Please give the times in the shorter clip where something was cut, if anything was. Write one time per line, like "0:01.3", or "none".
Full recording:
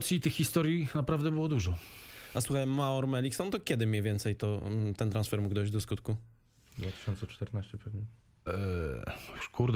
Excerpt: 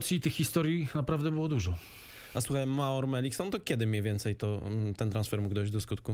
none